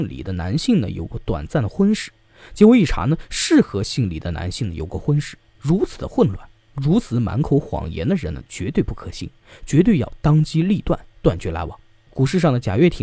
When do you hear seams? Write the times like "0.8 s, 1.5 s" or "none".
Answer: none